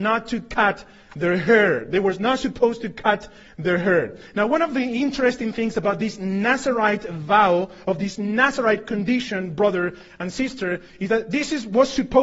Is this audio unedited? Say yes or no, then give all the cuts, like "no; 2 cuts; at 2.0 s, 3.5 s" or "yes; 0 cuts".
yes; 0 cuts